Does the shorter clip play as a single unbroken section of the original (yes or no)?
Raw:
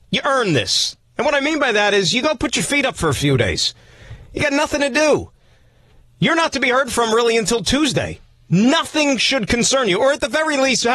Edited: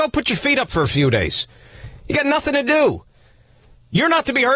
yes